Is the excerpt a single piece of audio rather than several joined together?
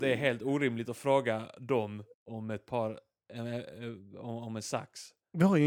no; 1 cut; at 2.1 s

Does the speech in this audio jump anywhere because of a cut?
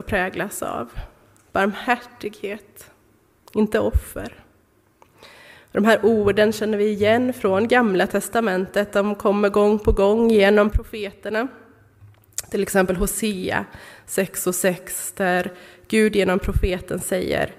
no; 0 cuts

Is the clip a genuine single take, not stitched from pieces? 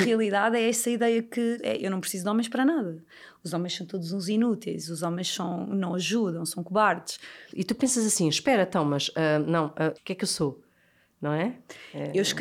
no; 3 cuts; at 1.6 s, 7.5 s, 10.0 s

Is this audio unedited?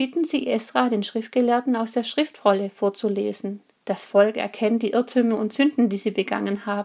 no; 1 cut; at 3.8 s

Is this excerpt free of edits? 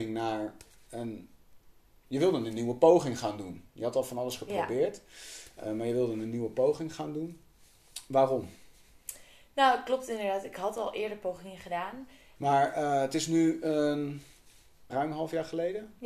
no; 2 cuts; at 12.3 s, 14.9 s

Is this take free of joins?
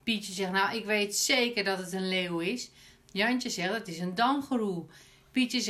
yes; 0 cuts

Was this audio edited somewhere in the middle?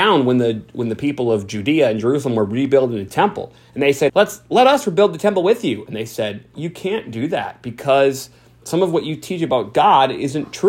yes; 2 cuts; at 4.1 s, 6.5 s

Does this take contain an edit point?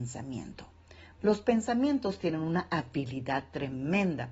yes; 1 cut; at 1.2 s

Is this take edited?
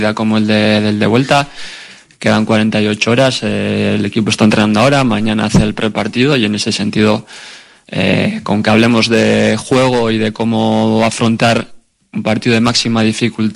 no; 0 cuts

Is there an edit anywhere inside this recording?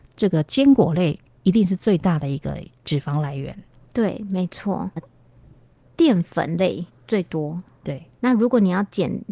yes; 3 cuts; at 5.0 s, 6.9 s, 8.2 s

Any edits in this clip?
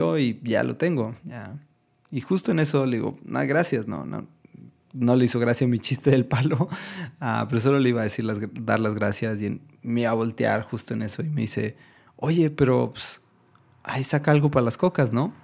no; 0 cuts

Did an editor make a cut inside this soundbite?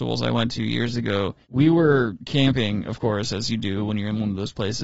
yes; 1 cut; at 1.4 s

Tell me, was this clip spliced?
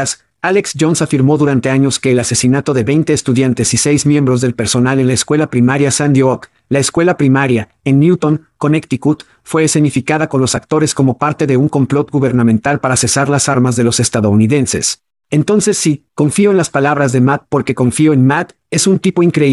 no; 0 cuts

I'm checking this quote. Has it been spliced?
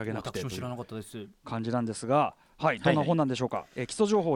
no; 0 cuts

